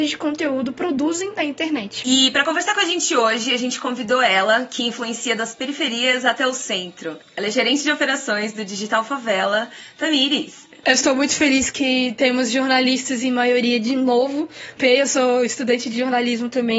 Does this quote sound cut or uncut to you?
cut